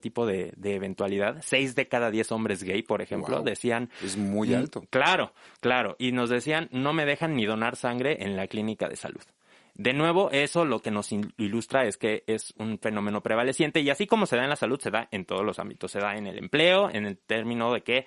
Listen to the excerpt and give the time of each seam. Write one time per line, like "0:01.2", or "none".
none